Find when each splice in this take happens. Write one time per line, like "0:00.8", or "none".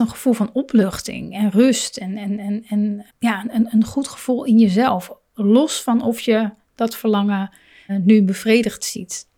0:03.1
0:07.9